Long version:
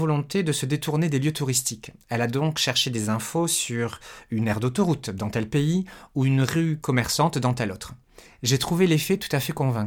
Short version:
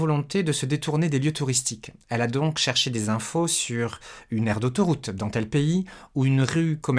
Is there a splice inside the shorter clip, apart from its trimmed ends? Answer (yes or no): no